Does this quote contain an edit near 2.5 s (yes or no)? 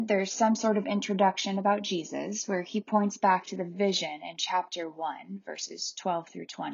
no